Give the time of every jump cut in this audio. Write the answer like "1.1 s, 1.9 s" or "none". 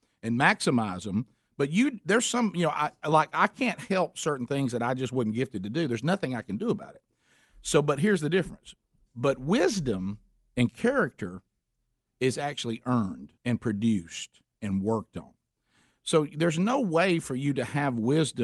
13.4 s